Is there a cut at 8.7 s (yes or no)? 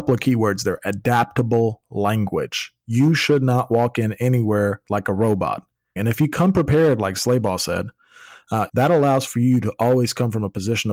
yes